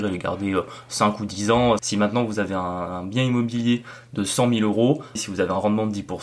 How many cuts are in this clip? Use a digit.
2